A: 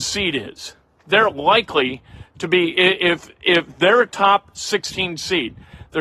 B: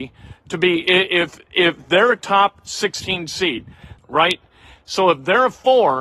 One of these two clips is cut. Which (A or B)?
B